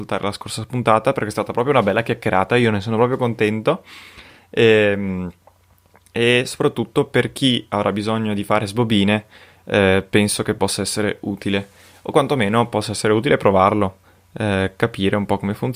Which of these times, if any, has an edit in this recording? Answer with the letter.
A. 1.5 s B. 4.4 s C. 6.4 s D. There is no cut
D